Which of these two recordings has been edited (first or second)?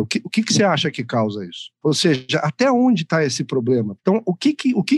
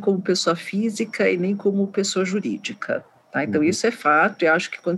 first